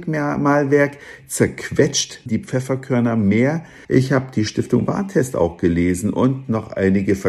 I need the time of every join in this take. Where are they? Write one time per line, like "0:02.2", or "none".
0:02.3
0:03.8